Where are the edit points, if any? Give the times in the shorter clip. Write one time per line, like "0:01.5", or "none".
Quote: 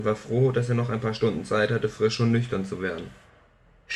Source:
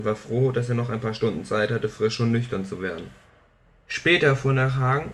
none